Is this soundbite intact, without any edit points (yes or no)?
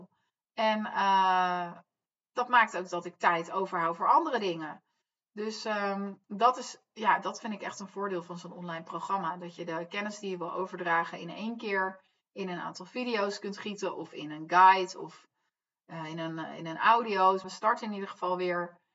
no